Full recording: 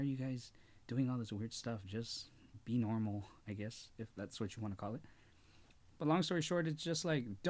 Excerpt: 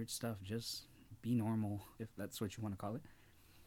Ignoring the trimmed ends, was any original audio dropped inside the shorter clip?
yes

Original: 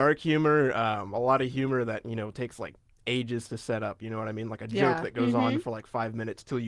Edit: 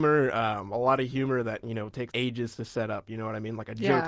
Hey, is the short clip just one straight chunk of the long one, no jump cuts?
no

